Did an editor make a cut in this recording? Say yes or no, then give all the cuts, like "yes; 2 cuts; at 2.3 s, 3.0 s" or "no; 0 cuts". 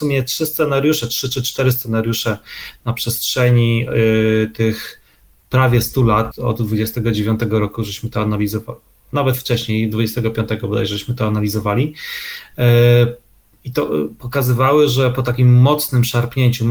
yes; 1 cut; at 6.3 s